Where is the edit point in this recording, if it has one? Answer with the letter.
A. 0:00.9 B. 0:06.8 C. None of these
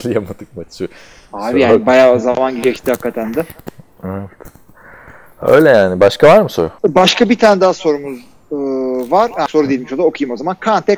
B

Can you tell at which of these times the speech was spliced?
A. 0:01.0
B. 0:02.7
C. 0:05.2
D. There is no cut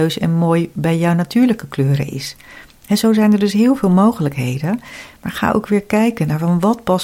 D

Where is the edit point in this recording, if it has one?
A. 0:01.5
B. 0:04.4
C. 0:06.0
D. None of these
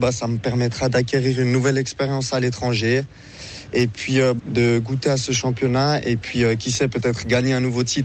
B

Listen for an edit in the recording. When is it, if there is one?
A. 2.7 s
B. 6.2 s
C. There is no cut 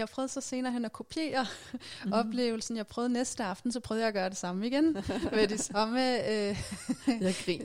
C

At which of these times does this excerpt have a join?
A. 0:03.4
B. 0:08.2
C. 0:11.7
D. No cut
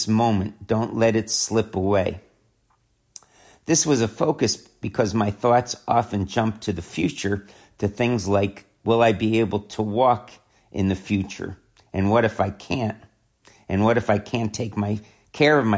D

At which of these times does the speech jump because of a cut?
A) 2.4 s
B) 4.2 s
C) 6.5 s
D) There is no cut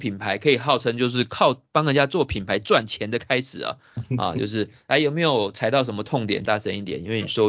C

